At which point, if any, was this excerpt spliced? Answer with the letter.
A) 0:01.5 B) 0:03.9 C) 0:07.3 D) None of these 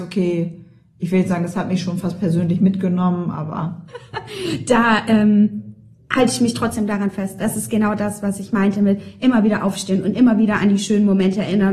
B